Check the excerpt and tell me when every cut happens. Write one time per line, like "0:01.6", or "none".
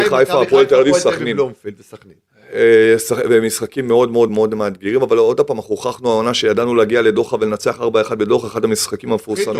0:04.3